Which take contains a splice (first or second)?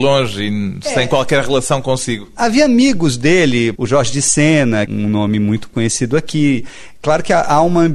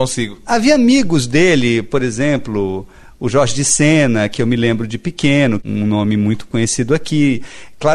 first